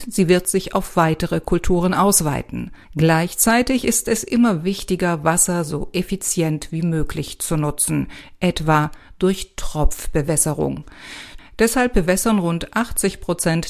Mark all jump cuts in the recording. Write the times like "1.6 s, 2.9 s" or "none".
2.8 s, 11.4 s